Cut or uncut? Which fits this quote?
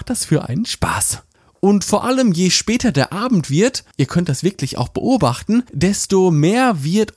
uncut